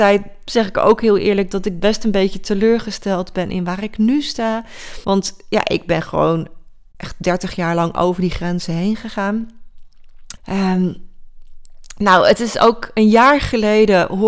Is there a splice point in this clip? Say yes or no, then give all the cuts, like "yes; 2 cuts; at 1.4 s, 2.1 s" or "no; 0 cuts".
yes; 2 cuts; at 5.0 s, 10.4 s